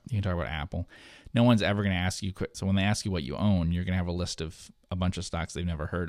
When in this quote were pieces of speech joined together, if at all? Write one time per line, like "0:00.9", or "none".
0:02.5